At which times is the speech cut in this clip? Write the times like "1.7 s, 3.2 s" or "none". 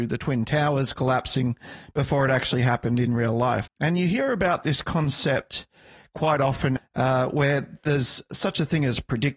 3.7 s, 6.8 s